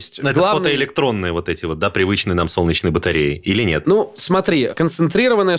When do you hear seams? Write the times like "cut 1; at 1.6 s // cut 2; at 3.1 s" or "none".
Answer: none